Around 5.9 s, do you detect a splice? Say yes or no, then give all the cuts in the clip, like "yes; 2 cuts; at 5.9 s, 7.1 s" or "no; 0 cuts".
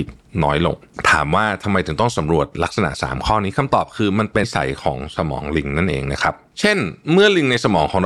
no; 1 cut; at 4.4 s